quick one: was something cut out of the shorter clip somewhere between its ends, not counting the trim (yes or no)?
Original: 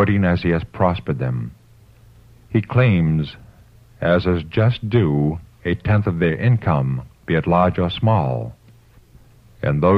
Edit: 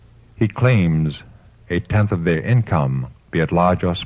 yes